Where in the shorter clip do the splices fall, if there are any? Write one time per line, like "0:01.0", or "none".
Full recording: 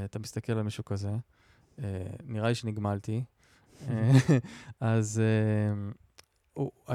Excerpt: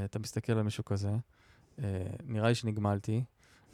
none

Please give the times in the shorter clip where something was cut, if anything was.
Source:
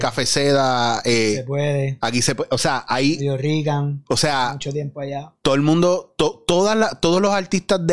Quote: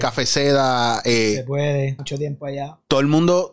0:02.0

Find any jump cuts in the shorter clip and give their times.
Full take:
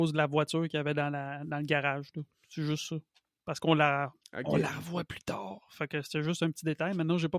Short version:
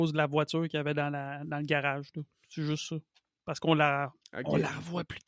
none

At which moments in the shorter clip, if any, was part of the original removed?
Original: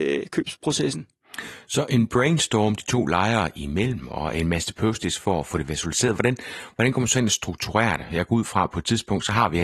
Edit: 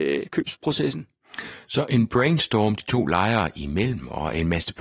none

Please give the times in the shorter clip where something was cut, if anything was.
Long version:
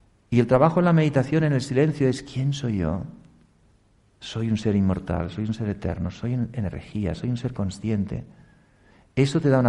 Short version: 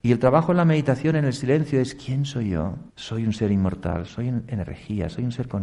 0:02.9
0:04.1

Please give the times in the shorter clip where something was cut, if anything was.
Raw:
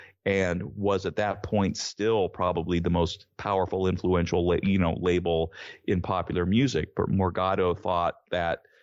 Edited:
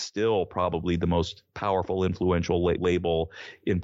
0:02.8

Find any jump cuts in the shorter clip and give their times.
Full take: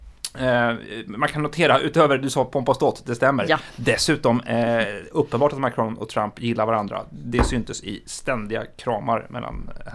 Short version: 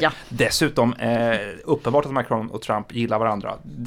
none

